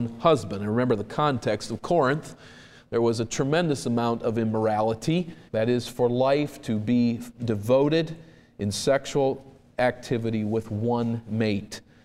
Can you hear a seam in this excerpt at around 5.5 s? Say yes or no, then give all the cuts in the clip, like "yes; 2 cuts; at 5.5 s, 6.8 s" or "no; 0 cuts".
yes; 1 cut; at 5.5 s